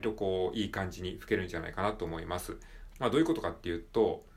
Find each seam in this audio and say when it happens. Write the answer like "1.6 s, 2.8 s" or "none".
2.9 s